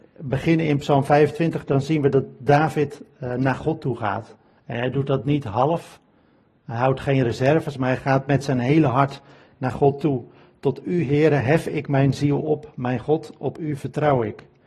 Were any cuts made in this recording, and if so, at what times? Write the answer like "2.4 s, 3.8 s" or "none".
none